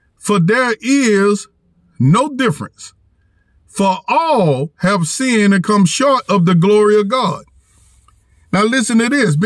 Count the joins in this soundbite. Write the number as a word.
zero